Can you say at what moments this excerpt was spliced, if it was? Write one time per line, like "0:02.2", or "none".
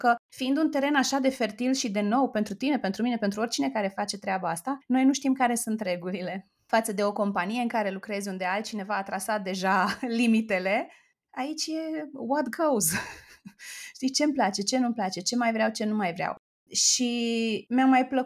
none